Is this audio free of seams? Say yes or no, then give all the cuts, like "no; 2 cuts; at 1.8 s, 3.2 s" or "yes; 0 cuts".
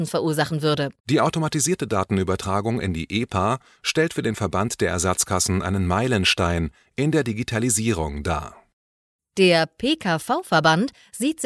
no; 1 cut; at 1.0 s